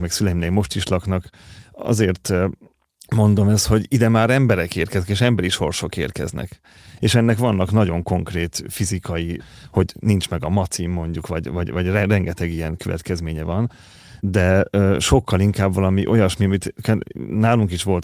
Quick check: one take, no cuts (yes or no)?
no